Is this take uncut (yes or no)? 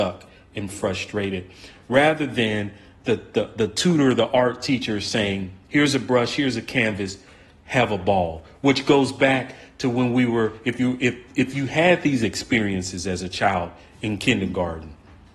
yes